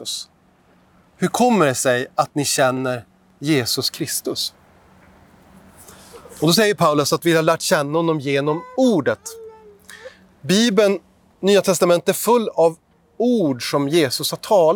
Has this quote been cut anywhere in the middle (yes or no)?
no